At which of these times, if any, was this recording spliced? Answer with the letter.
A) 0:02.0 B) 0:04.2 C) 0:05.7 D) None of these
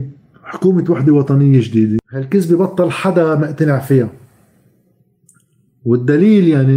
A